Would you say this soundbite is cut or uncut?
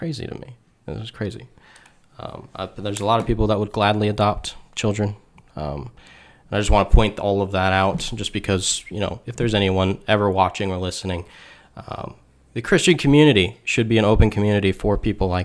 uncut